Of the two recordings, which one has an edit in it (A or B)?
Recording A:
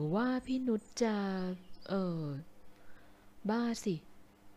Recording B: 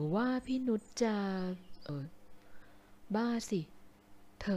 B